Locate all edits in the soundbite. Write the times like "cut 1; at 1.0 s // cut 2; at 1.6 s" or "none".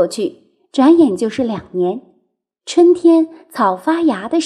none